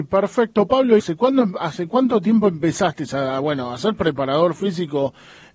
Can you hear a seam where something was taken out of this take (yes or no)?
yes